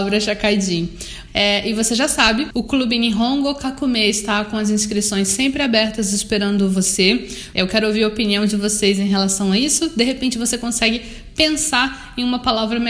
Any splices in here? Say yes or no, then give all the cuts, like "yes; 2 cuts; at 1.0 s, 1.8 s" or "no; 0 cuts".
yes; 3 cuts; at 1.3 s, 2.5 s, 7.5 s